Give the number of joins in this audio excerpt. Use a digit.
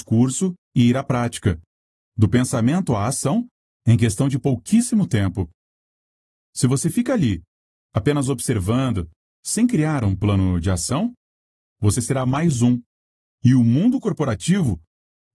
0